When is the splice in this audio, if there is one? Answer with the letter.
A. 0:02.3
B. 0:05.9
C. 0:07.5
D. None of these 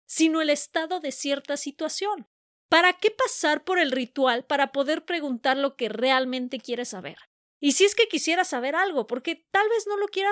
D